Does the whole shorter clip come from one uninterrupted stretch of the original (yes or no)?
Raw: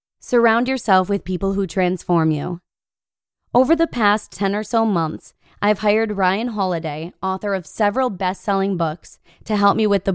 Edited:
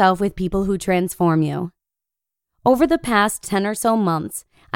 yes